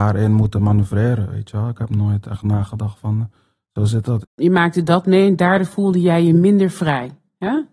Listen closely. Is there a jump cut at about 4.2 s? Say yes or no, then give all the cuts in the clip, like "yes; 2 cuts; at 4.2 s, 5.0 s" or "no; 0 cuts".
yes; 1 cut; at 4.2 s